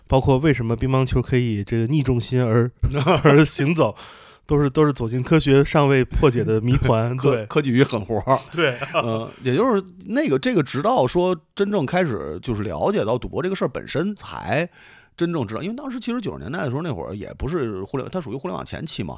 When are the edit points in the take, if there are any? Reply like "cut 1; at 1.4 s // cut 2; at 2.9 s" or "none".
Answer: cut 1; at 14.2 s